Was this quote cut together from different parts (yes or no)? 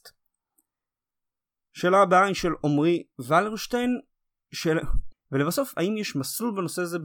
yes